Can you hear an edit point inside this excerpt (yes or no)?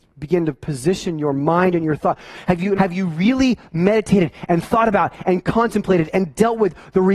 yes